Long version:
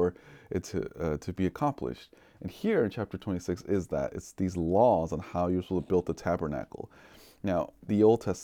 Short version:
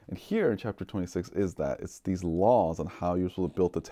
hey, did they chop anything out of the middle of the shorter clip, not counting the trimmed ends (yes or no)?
no